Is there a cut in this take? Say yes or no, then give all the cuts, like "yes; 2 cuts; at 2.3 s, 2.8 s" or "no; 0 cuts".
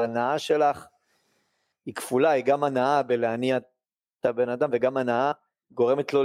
no; 0 cuts